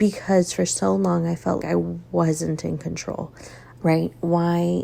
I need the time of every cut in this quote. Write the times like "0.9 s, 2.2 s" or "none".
1.6 s, 3.8 s